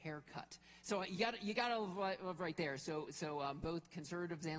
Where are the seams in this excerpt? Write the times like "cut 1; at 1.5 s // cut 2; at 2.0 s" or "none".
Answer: none